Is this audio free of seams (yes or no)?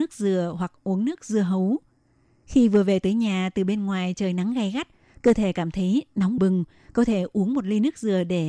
no